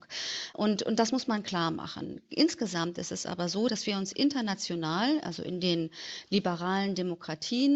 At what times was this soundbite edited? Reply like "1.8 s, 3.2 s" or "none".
none